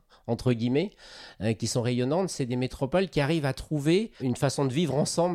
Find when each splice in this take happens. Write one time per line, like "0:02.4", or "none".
0:04.2